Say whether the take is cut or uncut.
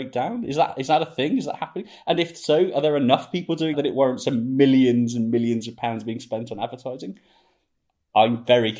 cut